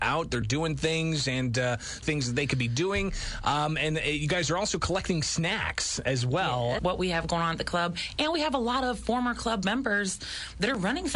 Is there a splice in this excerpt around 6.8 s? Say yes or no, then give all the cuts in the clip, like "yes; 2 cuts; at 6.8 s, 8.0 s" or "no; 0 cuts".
yes; 2 cuts; at 2.0 s, 6.8 s